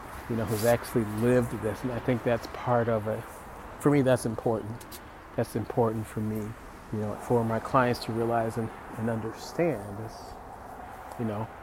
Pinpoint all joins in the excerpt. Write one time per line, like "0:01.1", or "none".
0:07.1